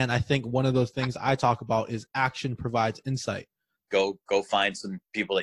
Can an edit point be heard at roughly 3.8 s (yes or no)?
yes